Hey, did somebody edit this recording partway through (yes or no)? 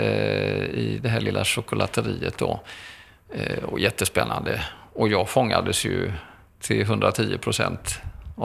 no